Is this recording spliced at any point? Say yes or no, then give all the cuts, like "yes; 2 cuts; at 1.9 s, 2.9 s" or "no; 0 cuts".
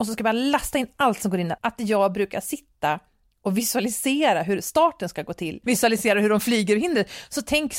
yes; 2 cuts; at 1.6 s, 5.6 s